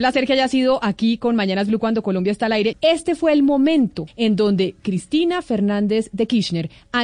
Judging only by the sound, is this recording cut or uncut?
cut